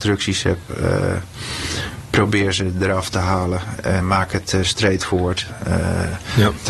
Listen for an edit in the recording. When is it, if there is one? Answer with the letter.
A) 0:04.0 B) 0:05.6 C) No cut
A